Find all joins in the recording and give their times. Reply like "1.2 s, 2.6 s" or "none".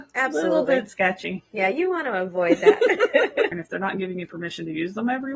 3.5 s